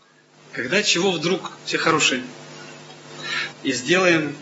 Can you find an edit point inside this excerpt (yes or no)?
yes